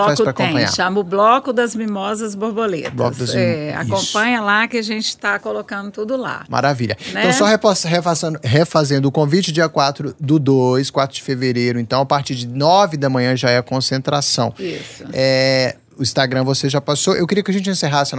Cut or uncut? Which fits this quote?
uncut